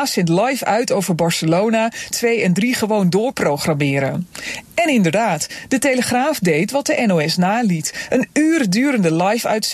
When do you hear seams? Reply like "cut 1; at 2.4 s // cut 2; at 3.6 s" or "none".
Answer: cut 1; at 2.1 s